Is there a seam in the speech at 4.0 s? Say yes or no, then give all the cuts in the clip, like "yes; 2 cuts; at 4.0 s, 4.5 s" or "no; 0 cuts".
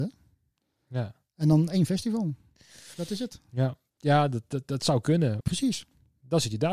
yes; 2 cuts; at 4.0 s, 5.4 s